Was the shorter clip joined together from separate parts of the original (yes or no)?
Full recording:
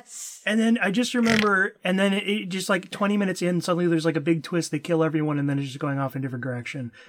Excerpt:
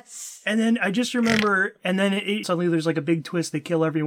yes